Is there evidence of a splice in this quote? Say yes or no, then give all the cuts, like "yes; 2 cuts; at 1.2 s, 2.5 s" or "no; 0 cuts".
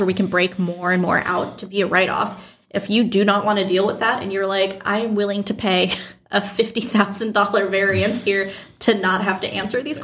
no; 0 cuts